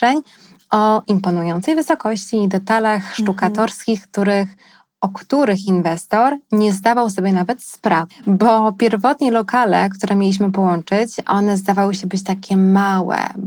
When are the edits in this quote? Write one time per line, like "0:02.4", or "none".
0:08.1